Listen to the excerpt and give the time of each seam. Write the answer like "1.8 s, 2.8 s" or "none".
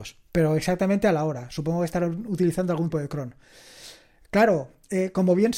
2.9 s